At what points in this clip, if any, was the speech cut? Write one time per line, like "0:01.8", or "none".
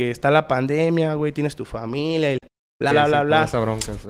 0:02.9